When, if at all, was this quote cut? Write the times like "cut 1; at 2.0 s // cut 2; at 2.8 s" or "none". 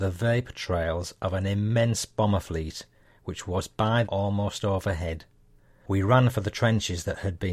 cut 1; at 4.0 s